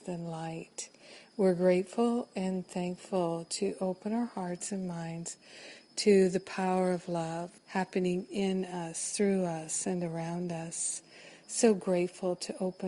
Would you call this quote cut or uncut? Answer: cut